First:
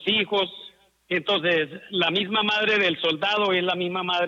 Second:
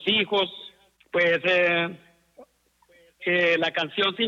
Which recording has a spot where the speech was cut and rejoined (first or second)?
second